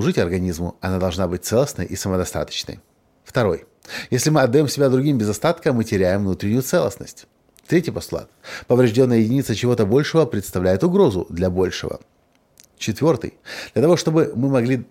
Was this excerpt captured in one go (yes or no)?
yes